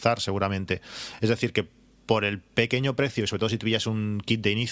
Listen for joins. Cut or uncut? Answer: uncut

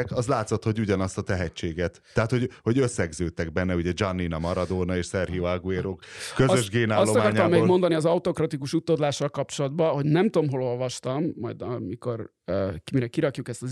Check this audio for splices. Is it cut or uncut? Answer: uncut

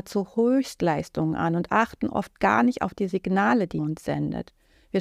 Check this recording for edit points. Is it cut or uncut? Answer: cut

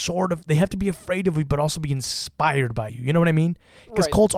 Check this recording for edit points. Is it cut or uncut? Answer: uncut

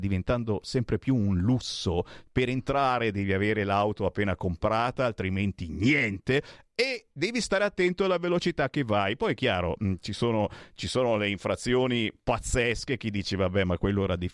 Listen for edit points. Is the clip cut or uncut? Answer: uncut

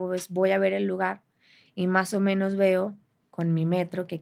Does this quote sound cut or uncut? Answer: uncut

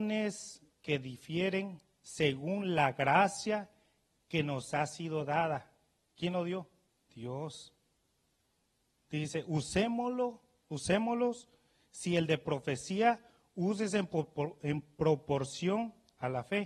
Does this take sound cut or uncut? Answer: cut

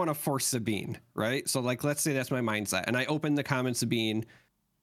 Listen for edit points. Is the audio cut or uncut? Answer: uncut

